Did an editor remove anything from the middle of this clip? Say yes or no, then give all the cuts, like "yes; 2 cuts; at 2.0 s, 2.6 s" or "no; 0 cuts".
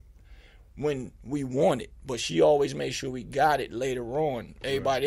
no; 0 cuts